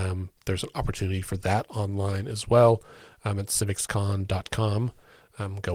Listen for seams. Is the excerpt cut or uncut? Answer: uncut